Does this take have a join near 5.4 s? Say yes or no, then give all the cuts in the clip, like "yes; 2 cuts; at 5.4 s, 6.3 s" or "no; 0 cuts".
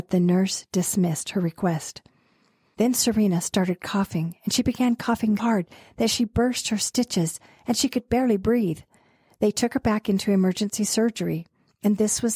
yes; 1 cut; at 5.4 s